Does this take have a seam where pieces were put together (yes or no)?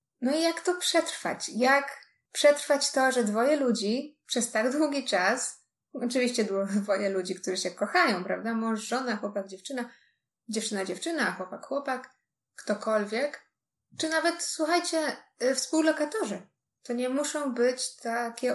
no